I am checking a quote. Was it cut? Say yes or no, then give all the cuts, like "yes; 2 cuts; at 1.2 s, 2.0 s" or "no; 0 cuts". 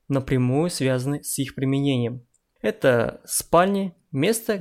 no; 0 cuts